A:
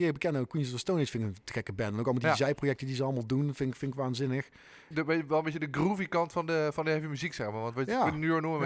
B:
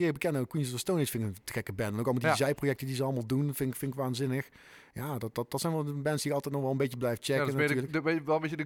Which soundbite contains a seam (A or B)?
A